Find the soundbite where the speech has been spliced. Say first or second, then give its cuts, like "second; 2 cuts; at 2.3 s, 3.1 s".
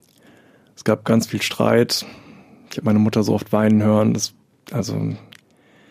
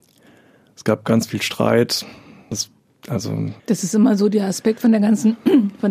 second; 2 cuts; at 2.5 s, 3.6 s